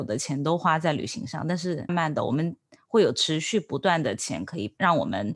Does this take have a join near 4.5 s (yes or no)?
no